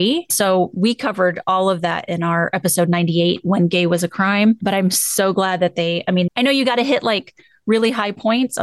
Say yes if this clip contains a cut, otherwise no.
yes